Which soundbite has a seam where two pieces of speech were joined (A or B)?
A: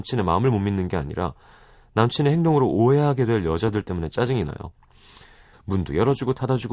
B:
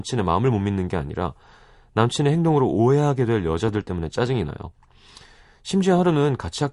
A